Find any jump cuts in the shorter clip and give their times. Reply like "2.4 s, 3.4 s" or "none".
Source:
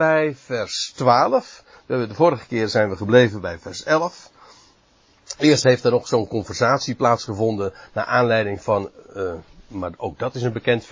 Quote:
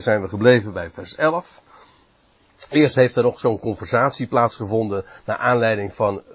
none